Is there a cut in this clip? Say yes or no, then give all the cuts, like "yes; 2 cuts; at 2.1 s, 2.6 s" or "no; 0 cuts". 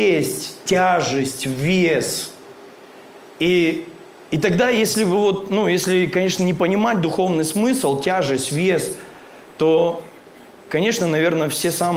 no; 0 cuts